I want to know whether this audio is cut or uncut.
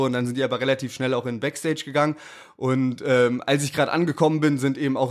uncut